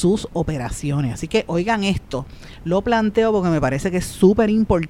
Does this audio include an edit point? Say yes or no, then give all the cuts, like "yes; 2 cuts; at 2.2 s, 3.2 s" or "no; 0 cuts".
no; 0 cuts